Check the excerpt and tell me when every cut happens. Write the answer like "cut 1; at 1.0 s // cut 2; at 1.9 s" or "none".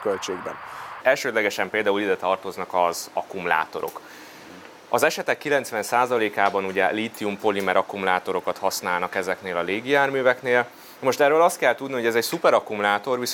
cut 1; at 1.0 s